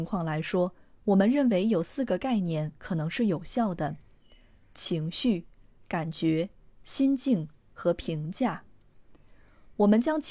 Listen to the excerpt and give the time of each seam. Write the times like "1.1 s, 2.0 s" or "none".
none